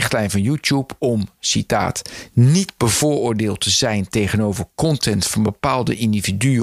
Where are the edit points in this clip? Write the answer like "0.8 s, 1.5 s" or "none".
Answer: none